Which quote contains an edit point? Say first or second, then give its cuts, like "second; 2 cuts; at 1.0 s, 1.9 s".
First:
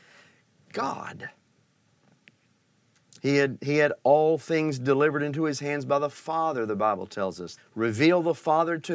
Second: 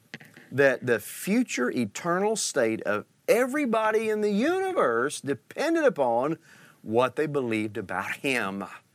first; 1 cut; at 7.6 s